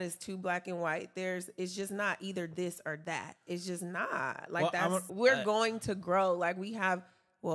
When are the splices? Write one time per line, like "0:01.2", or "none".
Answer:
0:05.1